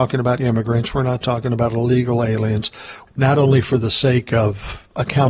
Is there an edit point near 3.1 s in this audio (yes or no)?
yes